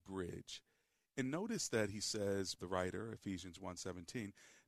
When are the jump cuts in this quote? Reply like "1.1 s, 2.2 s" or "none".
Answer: 2.6 s